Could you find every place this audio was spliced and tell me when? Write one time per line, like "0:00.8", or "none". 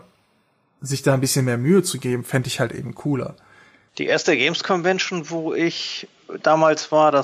0:03.9